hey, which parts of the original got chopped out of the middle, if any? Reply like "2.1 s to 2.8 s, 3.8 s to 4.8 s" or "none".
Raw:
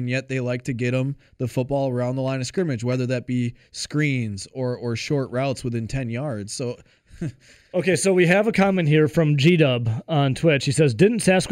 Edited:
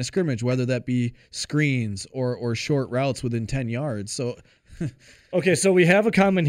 none

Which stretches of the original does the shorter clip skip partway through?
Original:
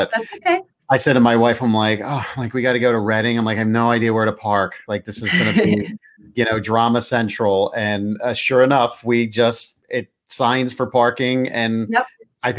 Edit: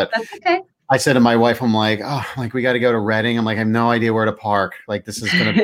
none

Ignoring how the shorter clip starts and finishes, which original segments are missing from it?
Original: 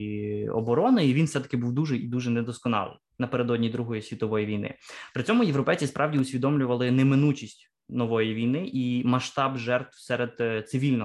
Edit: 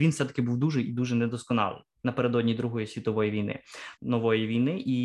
5.1 s to 7.8 s

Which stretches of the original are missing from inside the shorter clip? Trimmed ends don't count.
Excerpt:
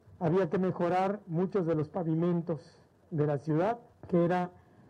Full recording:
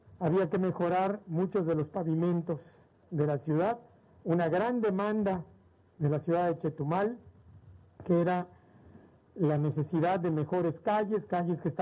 3.9 s to 7.9 s

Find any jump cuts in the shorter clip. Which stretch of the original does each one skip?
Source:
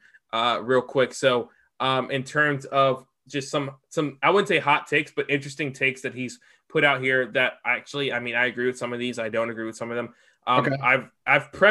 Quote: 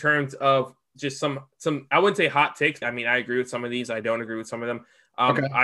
5.1 s to 8.1 s

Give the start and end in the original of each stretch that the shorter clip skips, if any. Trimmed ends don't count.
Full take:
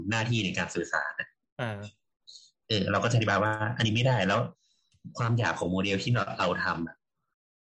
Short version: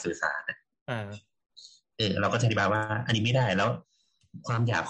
none

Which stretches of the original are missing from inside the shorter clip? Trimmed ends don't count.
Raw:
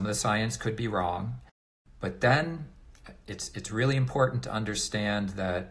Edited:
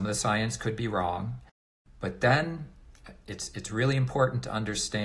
none

